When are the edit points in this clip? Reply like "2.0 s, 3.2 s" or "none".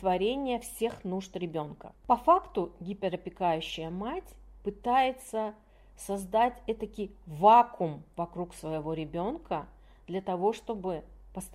1.9 s